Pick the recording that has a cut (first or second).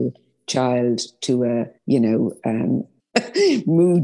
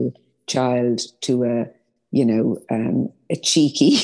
first